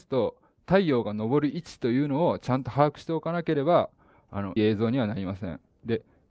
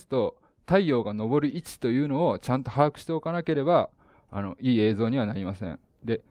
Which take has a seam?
first; 1 cut; at 4.6 s

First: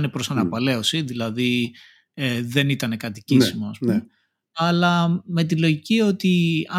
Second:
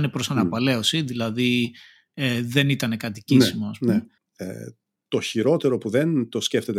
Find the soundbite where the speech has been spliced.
second; 1 cut; at 4.2 s

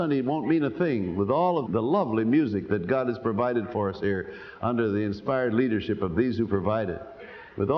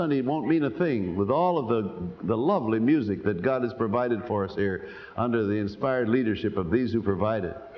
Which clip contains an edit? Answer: first; 1 cut; at 1.7 s

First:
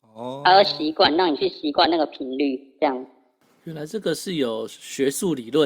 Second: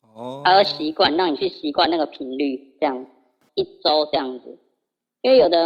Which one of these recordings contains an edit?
second; 1 cut; at 3.5 s

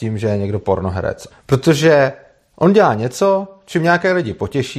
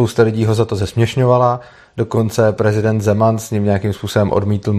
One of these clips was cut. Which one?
first; 1 cut; at 1.3 s

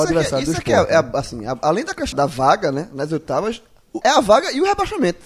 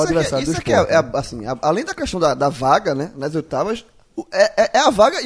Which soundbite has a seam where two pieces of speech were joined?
first; 2 cuts; at 2.1 s, 4.0 s

